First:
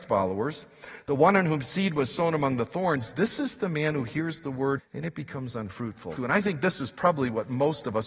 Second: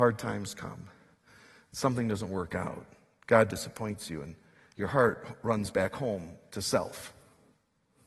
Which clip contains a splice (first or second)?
first